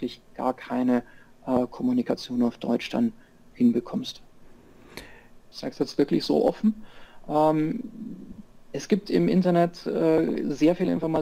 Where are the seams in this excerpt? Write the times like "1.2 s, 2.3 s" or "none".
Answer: 5.4 s